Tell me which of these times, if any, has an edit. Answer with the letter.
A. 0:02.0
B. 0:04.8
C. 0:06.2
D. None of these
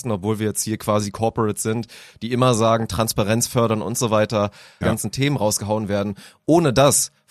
B